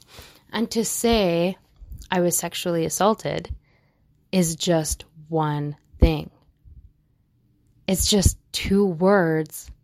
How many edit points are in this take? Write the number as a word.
zero